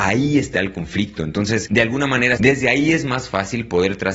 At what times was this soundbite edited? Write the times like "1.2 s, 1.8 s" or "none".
2.4 s

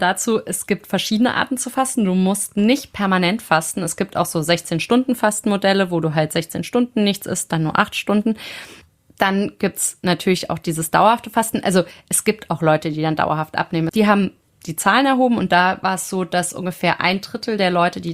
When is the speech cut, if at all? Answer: 13.9 s

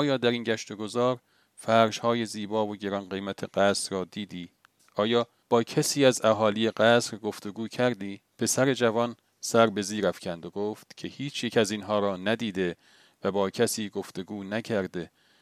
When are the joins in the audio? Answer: 4.8 s, 8.3 s

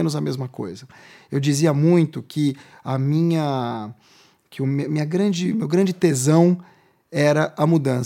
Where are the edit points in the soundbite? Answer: none

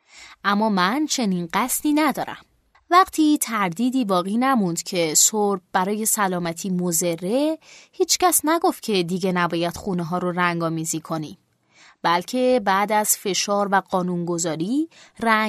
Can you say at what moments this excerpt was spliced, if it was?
2.7 s

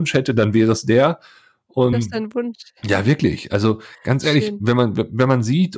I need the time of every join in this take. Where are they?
1.9 s

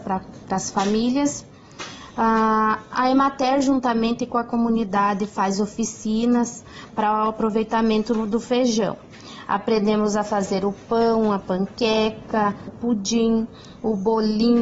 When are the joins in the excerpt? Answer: 12.7 s

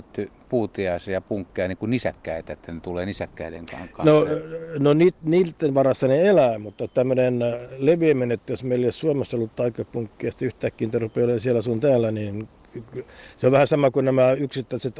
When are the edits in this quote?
none

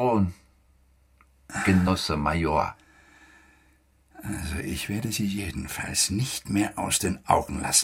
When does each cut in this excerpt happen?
none

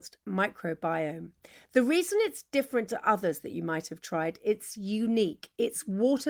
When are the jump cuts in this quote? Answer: none

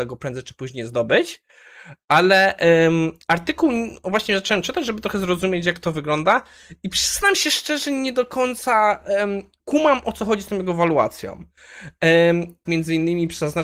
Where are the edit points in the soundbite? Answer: 9.6 s, 12.7 s

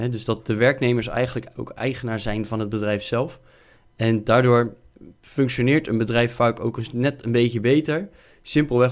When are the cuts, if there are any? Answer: none

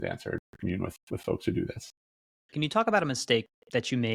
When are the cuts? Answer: none

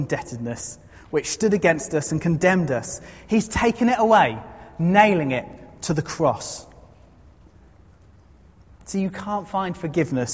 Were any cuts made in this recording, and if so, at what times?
none

